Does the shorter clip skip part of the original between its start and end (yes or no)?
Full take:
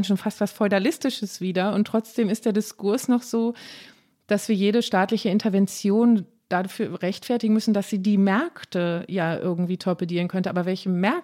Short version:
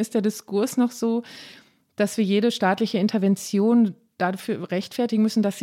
no